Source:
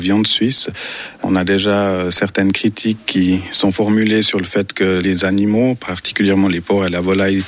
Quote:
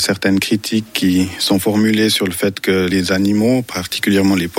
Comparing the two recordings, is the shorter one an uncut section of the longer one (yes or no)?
yes